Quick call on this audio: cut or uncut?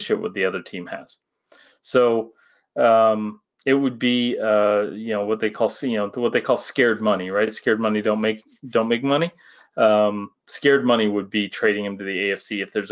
uncut